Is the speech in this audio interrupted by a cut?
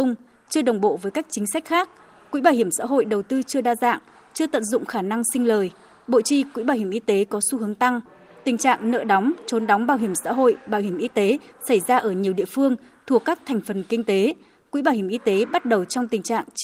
no; 0 cuts

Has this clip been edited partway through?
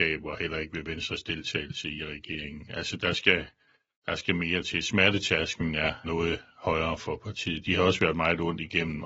yes; 1 cut; at 6.0 s

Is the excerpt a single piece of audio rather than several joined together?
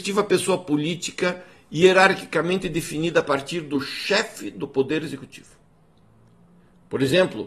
yes; 0 cuts

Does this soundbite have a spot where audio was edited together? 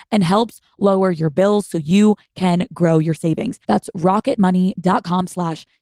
yes; 1 cut; at 3.6 s

